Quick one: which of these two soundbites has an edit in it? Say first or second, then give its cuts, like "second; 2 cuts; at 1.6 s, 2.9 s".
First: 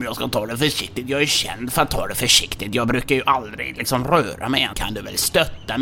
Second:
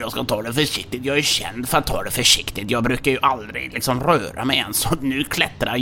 first; 1 cut; at 4.7 s